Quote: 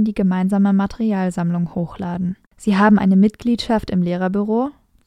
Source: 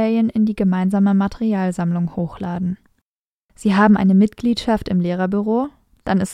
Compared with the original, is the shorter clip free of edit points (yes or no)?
no